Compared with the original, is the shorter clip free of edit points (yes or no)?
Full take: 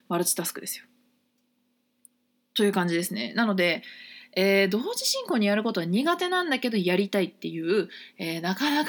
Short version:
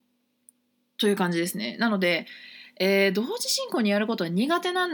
yes